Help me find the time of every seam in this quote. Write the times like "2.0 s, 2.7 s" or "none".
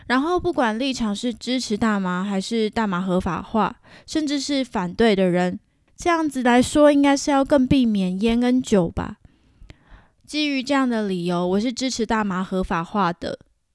5.9 s, 10.2 s